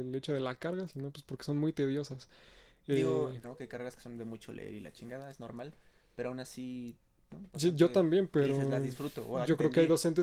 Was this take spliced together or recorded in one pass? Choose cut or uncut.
cut